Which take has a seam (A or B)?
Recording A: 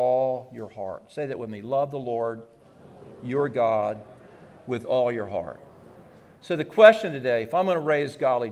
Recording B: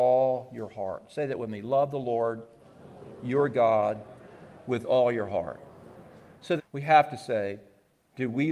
B